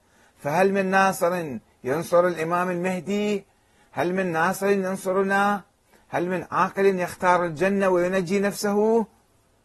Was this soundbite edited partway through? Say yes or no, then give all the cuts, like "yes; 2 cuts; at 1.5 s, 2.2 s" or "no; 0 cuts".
no; 0 cuts